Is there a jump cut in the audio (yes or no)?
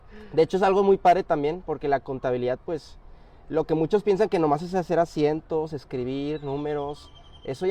no